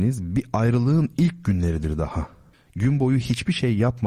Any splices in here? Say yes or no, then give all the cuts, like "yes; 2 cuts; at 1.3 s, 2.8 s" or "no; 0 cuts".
yes; 1 cut; at 2.5 s